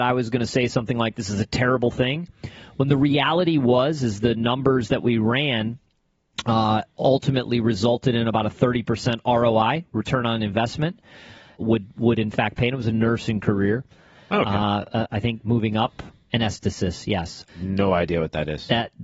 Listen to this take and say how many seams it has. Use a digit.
3